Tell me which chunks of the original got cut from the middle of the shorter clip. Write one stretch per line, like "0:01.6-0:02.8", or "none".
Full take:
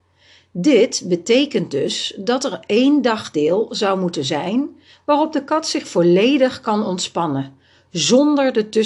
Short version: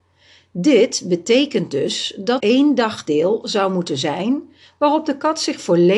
0:02.4-0:02.7